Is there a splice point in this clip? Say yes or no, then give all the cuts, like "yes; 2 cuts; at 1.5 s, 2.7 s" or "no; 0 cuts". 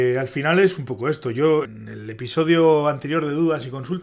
yes; 1 cut; at 1.6 s